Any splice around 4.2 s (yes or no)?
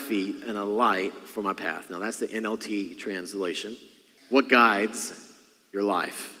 yes